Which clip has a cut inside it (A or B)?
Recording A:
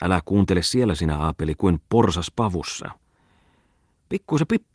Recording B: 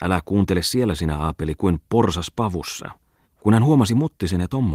B